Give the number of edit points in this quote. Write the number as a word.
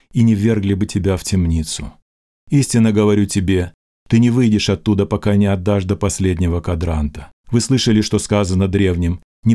one